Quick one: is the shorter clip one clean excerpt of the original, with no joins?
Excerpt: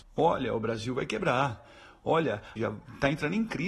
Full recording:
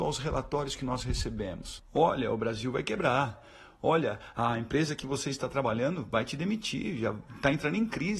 no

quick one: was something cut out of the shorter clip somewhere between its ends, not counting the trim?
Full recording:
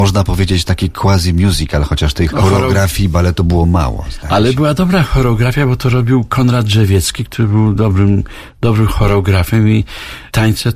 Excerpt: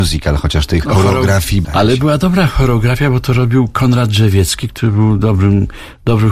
yes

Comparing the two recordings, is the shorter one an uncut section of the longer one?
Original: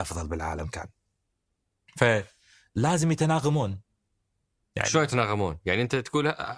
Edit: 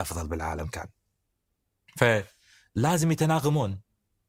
yes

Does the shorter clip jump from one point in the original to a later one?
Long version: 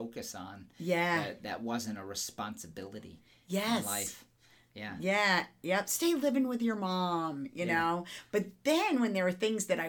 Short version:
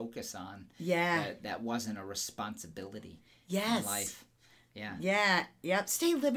no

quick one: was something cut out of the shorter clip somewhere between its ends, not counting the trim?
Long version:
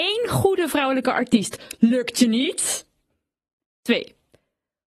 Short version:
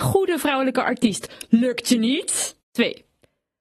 yes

